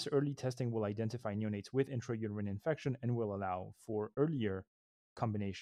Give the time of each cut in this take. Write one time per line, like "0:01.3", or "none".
none